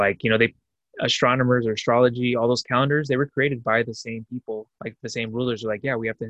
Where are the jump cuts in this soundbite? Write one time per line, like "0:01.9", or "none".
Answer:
0:04.7